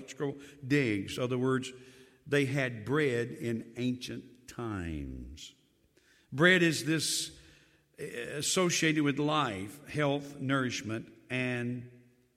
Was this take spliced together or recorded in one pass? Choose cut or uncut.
uncut